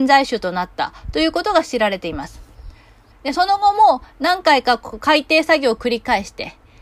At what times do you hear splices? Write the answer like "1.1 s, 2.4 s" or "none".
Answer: 3.1 s